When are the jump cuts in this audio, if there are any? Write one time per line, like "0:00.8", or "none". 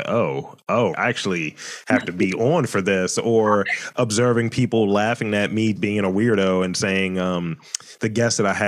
0:00.9
0:05.8